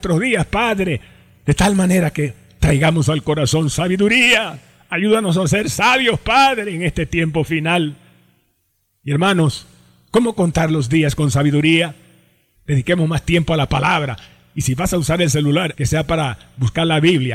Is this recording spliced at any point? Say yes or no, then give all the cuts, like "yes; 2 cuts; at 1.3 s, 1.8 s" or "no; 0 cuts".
yes; 2 cuts; at 12.6 s, 15.7 s